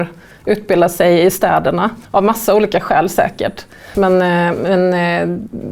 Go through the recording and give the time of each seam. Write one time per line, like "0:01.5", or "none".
0:02.1
0:03.9